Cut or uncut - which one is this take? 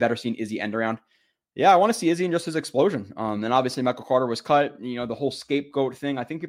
uncut